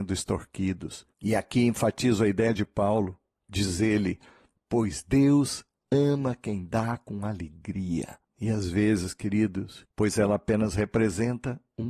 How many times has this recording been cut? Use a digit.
1